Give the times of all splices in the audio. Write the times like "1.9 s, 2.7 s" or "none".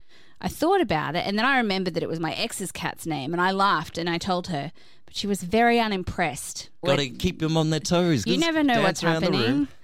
6.8 s, 8.3 s